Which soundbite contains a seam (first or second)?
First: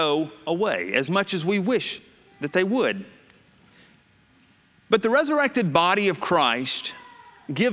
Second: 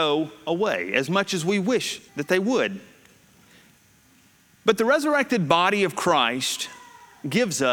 second